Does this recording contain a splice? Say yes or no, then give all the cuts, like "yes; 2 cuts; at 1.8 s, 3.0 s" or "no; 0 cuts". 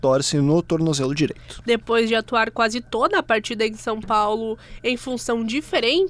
yes; 1 cut; at 1.6 s